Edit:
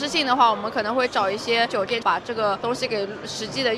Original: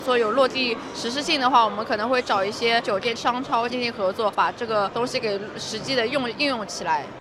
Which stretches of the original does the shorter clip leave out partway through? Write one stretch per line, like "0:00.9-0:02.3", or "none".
0:03.2-0:04.3